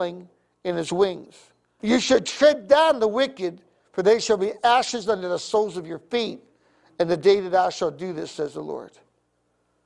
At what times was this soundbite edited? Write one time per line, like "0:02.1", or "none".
0:01.8